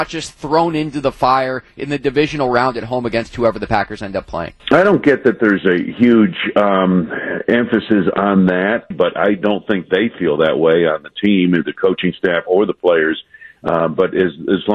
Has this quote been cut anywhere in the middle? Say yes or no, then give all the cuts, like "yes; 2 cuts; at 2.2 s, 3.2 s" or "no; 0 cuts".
yes; 2 cuts; at 4.6 s, 8.9 s